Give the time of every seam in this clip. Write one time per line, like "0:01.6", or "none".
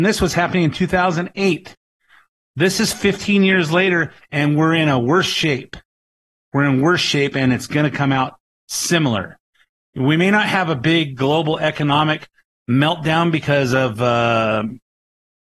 none